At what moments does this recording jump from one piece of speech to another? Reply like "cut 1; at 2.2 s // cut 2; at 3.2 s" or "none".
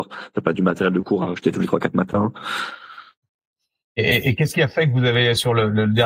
none

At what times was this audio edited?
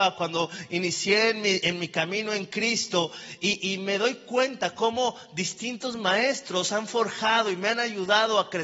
none

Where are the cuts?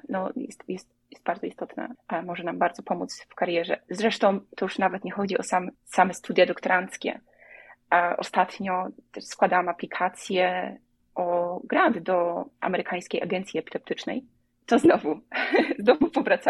none

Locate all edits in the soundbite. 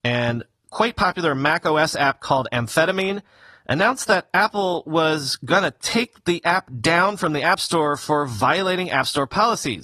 none

